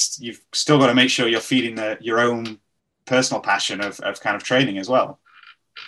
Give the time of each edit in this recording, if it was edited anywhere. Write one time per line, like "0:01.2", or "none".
none